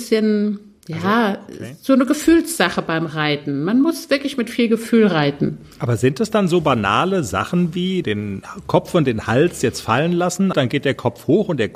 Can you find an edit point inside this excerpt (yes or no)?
yes